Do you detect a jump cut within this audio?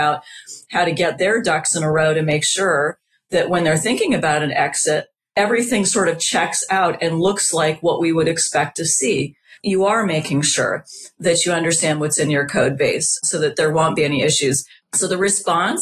no; 0 cuts

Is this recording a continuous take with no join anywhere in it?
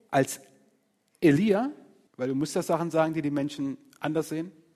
no; 1 cut; at 2.1 s

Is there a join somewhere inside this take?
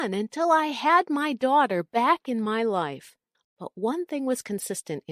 yes; 1 cut; at 3.4 s

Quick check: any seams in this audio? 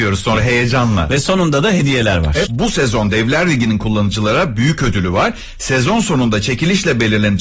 yes; 1 cut; at 2.5 s

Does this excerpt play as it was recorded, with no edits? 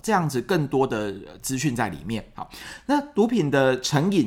yes; 0 cuts

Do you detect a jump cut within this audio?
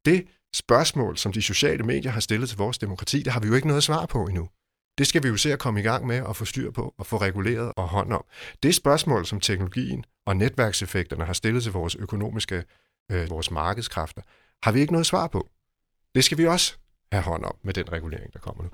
yes; 2 cuts; at 7.7 s, 13.3 s

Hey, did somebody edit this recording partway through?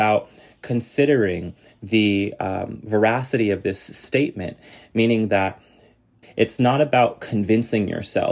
yes; 1 cut; at 6.2 s

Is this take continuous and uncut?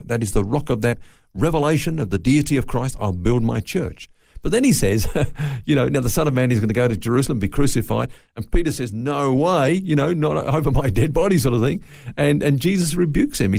yes; 0 cuts

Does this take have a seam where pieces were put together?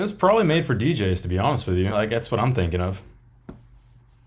no; 0 cuts

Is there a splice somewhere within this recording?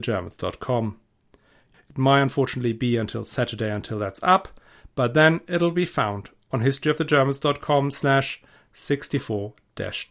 yes; 1 cut; at 1.7 s

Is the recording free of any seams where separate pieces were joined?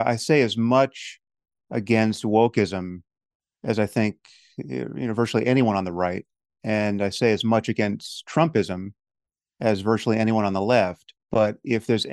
yes; 0 cuts

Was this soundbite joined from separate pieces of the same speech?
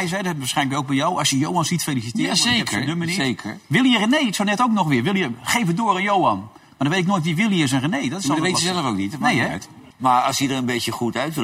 yes; 1 cut; at 9.9 s

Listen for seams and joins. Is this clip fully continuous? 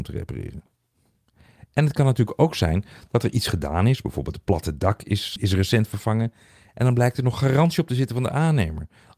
no; 1 cut; at 5.4 s

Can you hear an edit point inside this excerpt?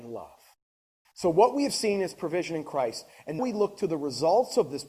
yes; 2 cuts; at 1.0 s, 3.4 s

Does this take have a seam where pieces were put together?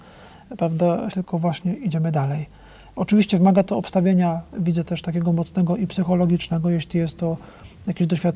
yes; 1 cut; at 1.1 s

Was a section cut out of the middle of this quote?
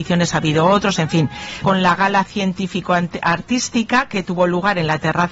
yes; 1 cut; at 1.6 s

